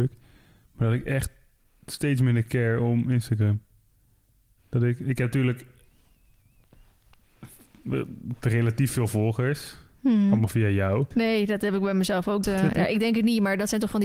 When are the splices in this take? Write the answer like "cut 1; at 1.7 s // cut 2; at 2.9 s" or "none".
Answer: cut 1; at 11.1 s // cut 2; at 12.4 s

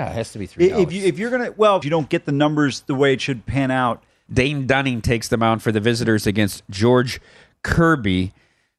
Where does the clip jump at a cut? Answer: cut 1; at 1.8 s // cut 2; at 4.3 s

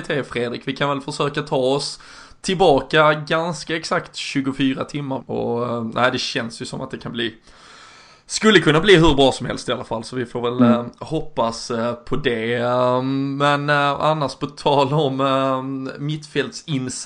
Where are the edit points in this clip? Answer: cut 1; at 5.2 s

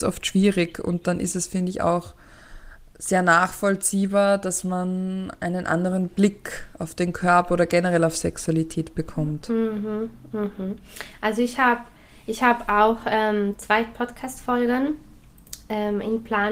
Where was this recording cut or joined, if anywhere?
none

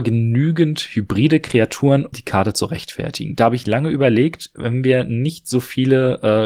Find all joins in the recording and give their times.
cut 1; at 2.1 s

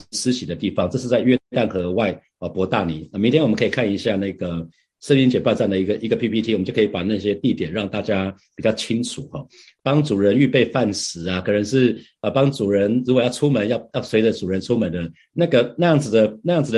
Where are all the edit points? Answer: cut 1; at 9.8 s

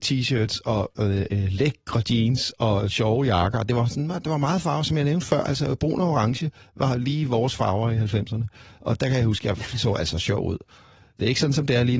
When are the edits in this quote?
none

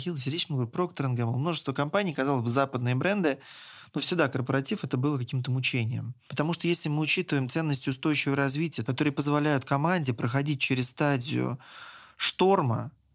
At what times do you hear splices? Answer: cut 1; at 6.3 s // cut 2; at 8.8 s

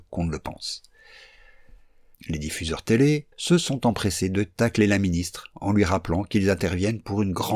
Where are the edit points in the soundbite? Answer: cut 1; at 2.1 s // cut 2; at 3.3 s

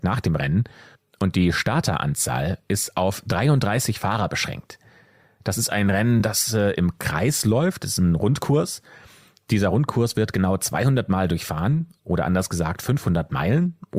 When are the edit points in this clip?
none

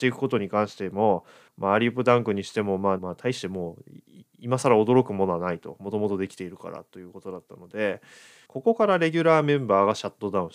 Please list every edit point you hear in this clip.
cut 1; at 3.0 s // cut 2; at 8.5 s

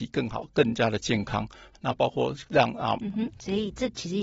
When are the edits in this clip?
cut 1; at 1.7 s // cut 2; at 3.0 s

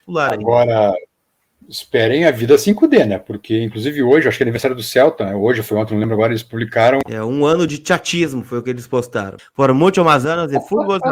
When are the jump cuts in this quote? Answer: cut 1; at 7.0 s // cut 2; at 9.4 s

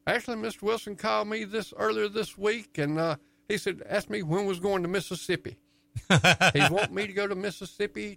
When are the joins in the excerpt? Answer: none

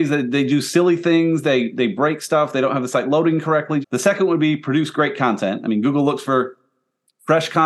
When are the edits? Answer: cut 1; at 3.8 s

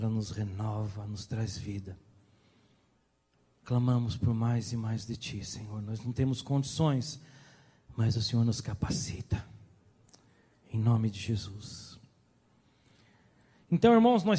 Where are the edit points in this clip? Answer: none

